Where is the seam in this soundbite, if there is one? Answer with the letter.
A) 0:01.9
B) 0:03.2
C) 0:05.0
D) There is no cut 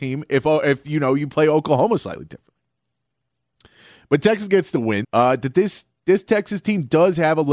C